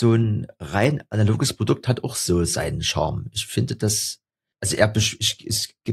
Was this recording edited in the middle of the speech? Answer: no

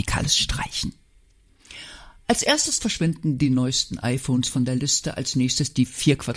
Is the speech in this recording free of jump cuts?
yes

